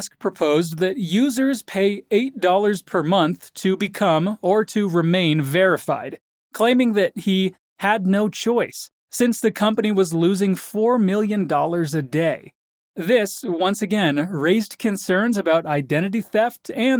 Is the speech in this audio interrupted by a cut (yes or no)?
no